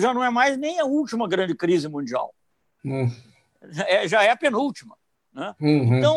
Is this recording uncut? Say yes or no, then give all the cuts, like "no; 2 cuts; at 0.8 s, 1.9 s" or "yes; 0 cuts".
yes; 0 cuts